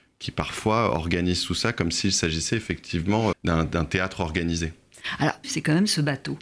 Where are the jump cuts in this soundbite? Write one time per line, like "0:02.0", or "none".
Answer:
0:03.3
0:05.4